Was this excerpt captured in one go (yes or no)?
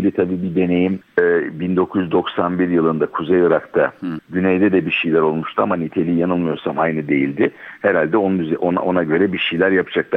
no